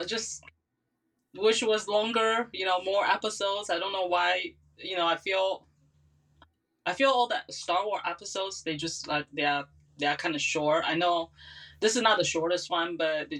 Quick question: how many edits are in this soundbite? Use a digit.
0